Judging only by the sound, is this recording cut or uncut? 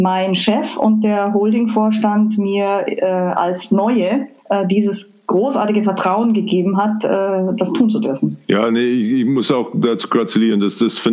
cut